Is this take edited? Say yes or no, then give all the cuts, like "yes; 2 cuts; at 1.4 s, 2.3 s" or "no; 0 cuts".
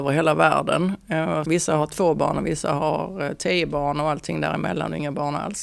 yes; 1 cut; at 1.4 s